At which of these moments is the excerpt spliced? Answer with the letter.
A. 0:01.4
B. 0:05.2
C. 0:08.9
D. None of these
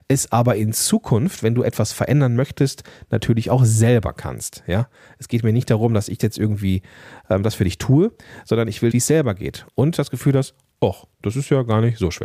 C